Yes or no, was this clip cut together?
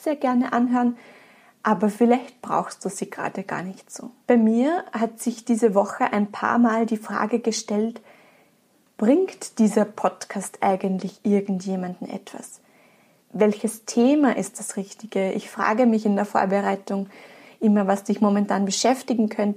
yes